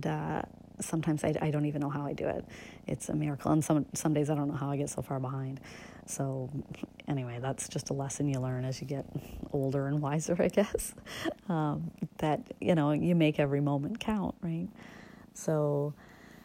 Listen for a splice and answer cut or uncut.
uncut